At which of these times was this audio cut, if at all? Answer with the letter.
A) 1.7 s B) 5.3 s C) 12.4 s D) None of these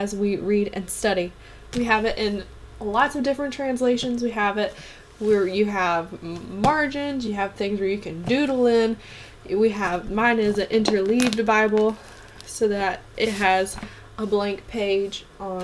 A